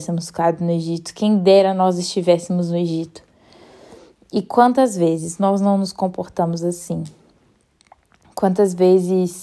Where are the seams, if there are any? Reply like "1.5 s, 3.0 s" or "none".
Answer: none

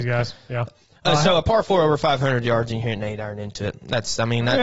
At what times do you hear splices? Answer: none

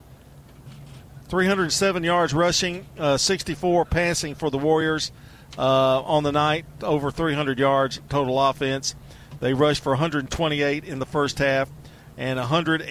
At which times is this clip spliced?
none

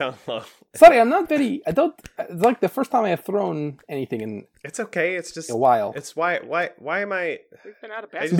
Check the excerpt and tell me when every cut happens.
none

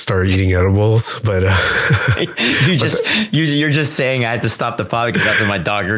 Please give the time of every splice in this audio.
none

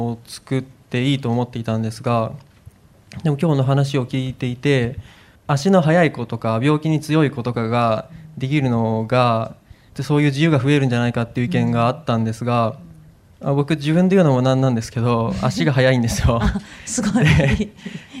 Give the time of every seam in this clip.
5.3 s

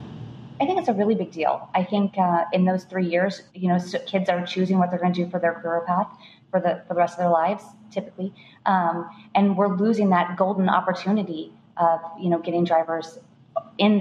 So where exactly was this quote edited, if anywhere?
3.5 s

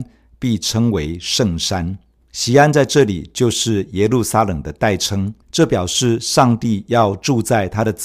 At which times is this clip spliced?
2.2 s, 5.4 s

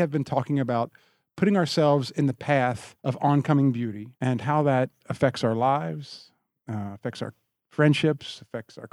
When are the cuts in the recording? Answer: 3.0 s, 4.1 s

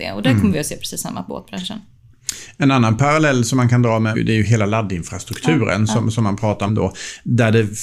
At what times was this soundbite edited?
4.1 s, 6.7 s

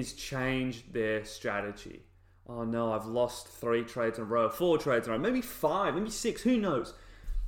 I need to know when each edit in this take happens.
none

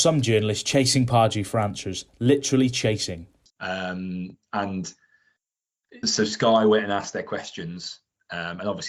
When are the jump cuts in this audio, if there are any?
3.5 s, 6.0 s

